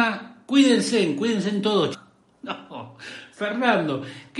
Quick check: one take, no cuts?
no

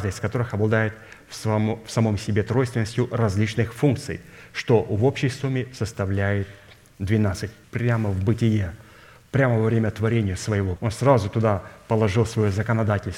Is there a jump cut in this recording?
yes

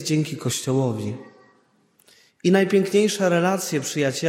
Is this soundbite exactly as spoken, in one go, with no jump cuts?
yes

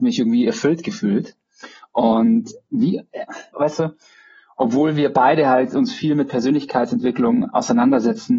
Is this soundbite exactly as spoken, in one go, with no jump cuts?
no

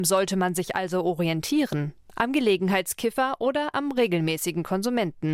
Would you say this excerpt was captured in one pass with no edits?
yes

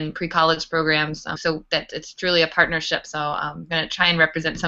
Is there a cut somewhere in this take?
yes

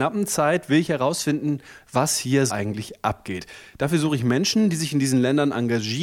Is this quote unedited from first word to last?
no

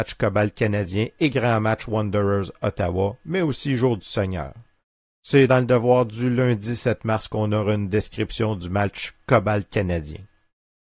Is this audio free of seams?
no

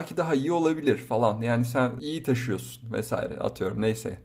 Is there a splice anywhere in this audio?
no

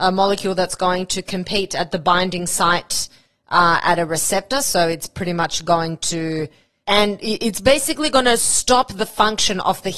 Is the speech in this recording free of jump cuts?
no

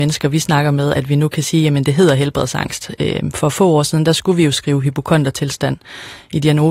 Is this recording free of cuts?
yes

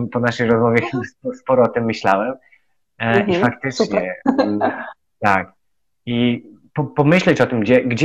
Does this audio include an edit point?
no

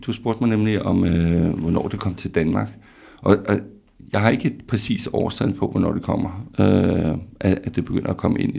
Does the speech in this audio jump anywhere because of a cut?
yes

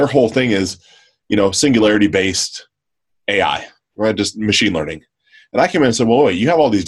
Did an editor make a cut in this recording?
no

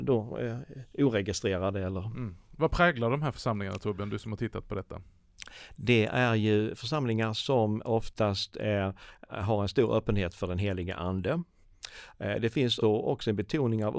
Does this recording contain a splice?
yes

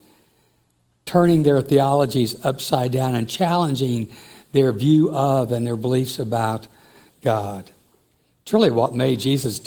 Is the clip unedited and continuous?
yes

